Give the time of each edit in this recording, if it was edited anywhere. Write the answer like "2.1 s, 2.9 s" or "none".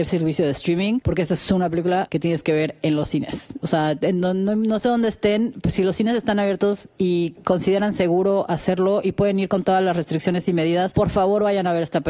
none

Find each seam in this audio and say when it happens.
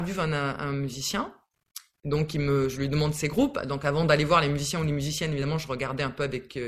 none

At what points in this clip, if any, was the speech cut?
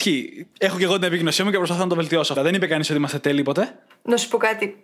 2.4 s

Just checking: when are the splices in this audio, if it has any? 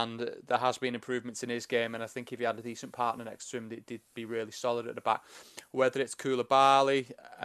none

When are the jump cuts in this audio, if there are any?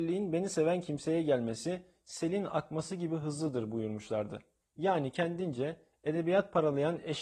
4.6 s

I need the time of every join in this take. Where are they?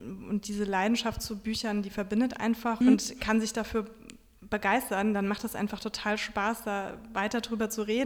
2.8 s

